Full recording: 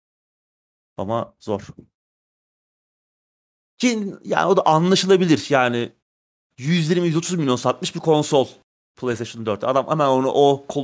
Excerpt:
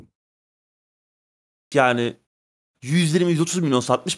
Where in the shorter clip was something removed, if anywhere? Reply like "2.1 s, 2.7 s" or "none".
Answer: 1.7 s